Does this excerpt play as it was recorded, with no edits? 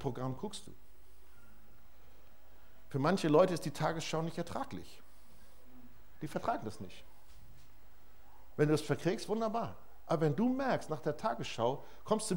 yes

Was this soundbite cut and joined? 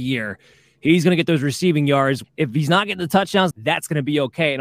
yes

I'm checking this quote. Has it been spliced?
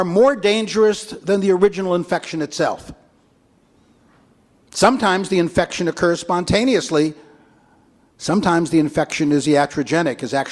no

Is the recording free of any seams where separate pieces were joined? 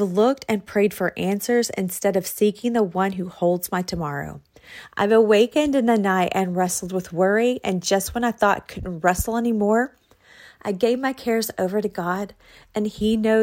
yes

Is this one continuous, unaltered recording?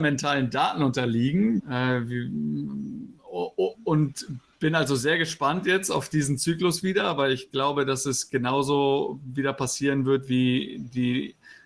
no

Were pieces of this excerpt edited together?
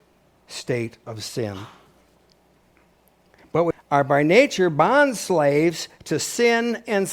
yes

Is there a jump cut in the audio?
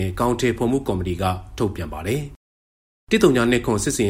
no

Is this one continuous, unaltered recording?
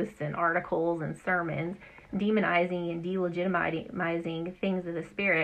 yes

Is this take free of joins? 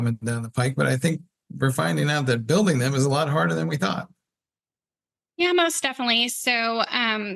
yes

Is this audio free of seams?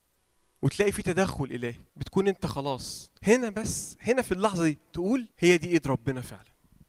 no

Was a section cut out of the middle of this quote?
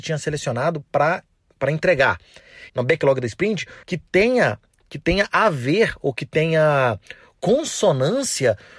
yes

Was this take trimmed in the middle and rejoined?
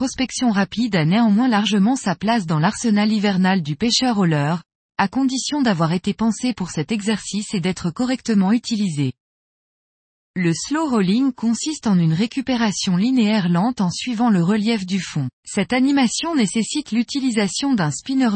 yes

